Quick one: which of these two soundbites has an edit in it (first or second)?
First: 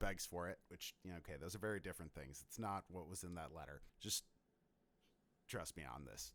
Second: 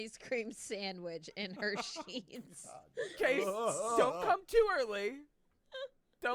first